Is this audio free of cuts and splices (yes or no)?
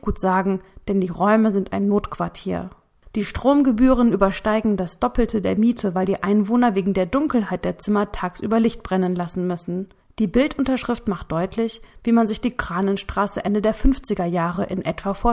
no